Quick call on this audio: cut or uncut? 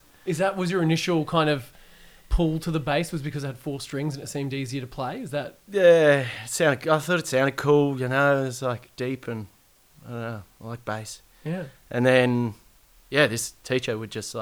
uncut